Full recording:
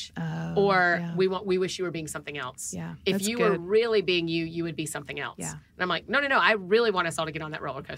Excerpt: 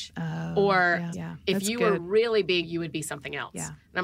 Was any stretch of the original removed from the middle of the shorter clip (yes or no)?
yes